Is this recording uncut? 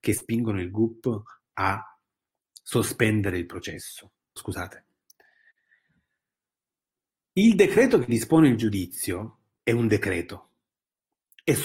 no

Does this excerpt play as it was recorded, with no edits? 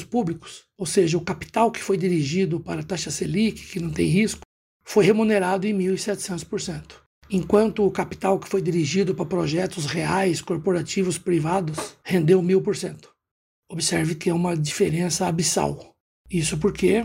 yes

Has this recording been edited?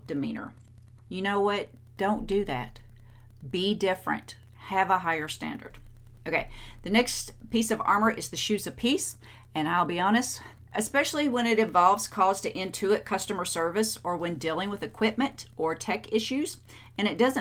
yes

